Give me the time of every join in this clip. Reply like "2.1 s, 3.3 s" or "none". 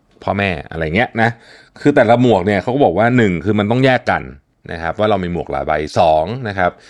none